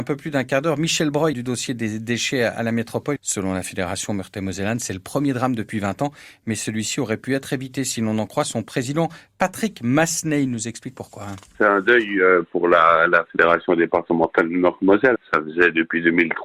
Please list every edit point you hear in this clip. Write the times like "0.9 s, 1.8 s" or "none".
1.3 s, 3.2 s, 15.1 s

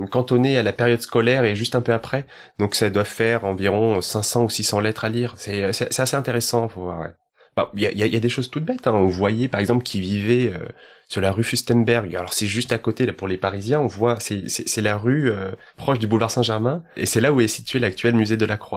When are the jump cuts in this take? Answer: none

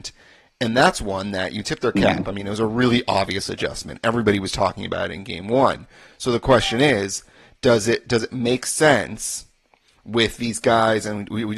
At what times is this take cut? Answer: none

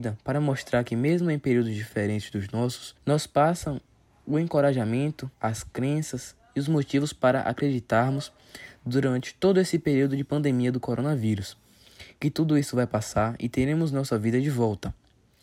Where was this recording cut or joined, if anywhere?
3.0 s, 5.3 s

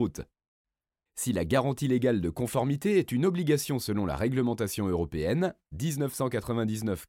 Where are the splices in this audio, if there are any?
1.1 s

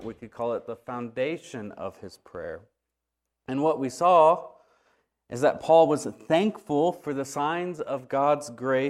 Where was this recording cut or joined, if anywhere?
none

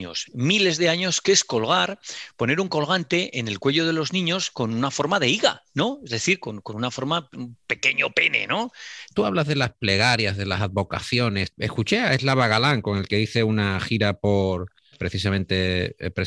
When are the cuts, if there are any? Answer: 9.1 s, 14.9 s

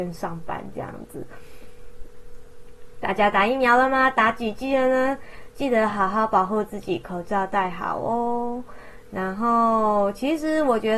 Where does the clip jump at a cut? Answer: none

